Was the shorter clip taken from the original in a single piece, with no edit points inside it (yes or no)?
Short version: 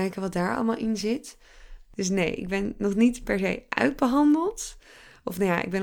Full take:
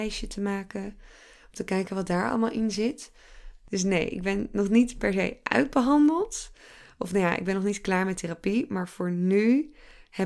yes